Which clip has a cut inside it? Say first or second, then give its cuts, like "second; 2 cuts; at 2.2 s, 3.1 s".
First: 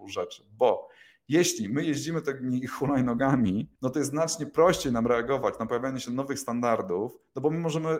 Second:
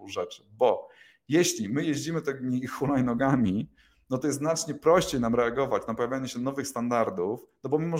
first; 1 cut; at 3.8 s